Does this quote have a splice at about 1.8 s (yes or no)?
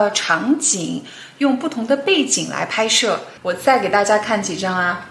no